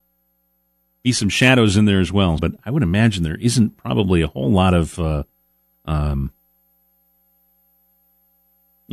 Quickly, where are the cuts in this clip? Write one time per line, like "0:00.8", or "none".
0:02.4